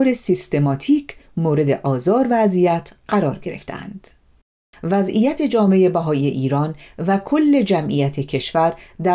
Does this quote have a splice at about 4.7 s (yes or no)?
yes